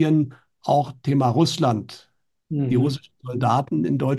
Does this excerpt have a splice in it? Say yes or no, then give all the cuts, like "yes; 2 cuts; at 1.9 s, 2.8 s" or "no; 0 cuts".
no; 0 cuts